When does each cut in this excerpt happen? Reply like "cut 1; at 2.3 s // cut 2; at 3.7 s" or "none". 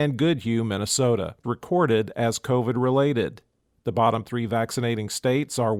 cut 1; at 1.4 s // cut 2; at 3.8 s